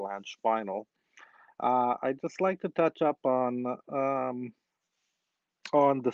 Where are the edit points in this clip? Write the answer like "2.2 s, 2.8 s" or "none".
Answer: 1.5 s